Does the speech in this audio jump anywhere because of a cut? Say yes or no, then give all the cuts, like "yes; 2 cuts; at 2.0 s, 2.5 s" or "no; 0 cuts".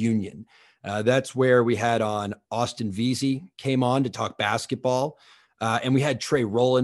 no; 0 cuts